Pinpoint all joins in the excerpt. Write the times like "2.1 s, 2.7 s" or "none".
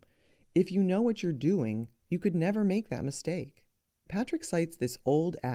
none